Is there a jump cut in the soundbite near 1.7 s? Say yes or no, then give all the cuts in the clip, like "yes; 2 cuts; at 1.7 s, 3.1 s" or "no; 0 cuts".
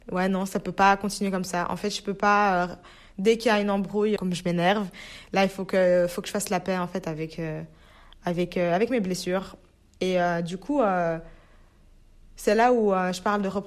no; 1 cut; at 4.2 s